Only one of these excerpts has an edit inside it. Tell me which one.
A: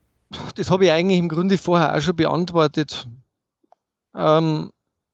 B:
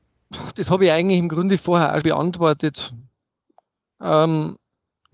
B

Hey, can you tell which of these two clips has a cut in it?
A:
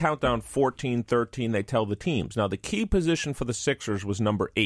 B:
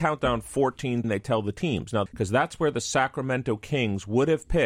B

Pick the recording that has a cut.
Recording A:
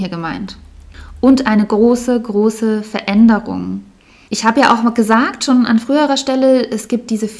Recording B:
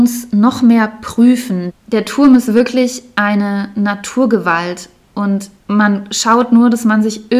B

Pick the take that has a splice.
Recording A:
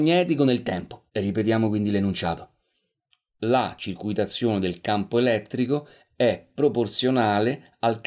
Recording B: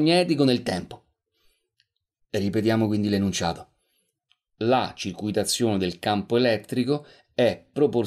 A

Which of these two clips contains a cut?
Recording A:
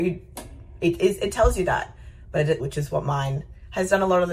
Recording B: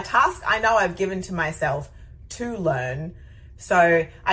A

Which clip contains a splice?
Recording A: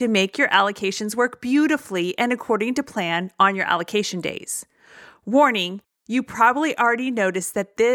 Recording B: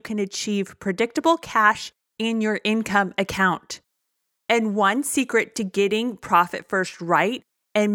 B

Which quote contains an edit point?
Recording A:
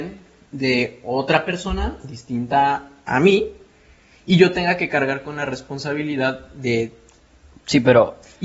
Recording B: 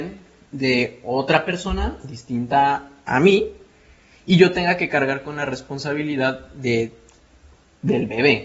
A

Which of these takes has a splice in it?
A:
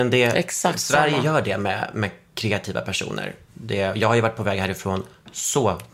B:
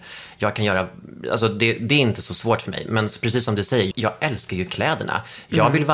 B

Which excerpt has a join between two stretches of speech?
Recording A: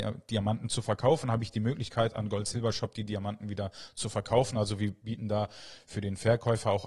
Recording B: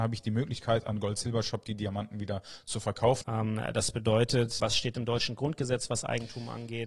B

